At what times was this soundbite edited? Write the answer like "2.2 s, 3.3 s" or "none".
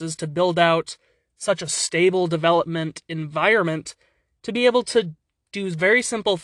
none